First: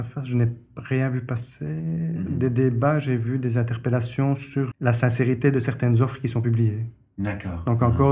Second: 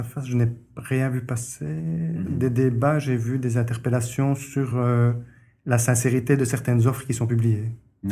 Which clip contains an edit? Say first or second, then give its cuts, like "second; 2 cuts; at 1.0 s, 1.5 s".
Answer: first; 1 cut; at 4.7 s